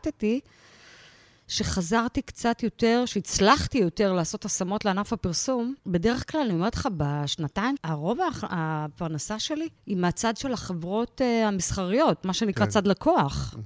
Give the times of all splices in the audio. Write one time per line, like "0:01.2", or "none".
0:05.8
0:07.8
0:09.8